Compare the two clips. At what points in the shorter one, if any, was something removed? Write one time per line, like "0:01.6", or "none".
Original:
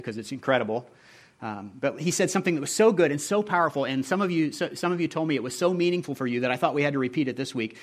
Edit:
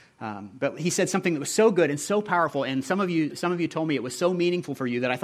0:03.3